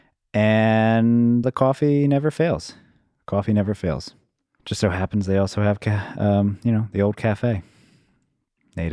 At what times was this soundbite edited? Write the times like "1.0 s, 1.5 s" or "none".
1.4 s, 4.6 s